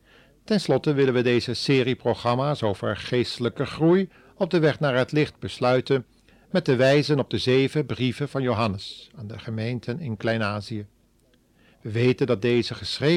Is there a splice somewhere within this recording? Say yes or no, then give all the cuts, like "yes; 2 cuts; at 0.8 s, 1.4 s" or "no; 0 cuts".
no; 0 cuts